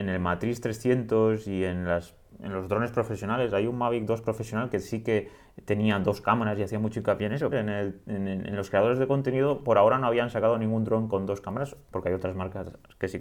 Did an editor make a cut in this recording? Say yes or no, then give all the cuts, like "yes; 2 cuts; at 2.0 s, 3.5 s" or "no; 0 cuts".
yes; 2 cuts; at 7.5 s, 11.9 s